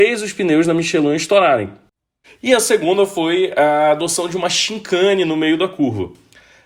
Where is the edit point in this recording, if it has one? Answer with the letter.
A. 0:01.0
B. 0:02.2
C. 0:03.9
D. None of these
B